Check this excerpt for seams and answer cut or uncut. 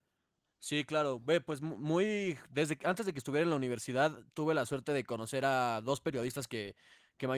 uncut